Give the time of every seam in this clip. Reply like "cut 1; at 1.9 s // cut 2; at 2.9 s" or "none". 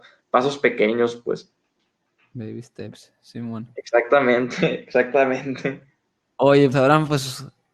cut 1; at 6.7 s